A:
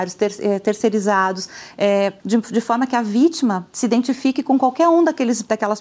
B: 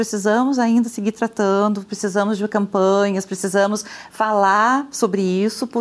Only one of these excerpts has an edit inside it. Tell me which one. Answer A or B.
A